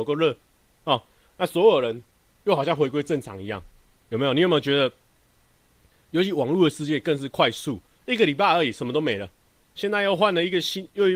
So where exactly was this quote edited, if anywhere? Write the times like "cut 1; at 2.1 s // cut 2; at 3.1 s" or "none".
none